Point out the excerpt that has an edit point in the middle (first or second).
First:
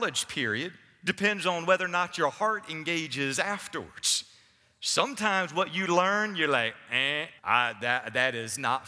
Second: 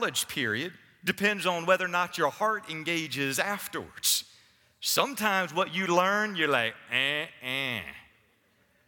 first